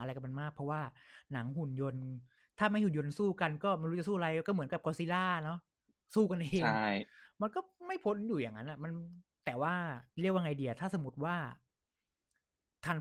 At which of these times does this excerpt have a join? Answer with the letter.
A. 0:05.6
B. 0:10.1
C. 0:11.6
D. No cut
B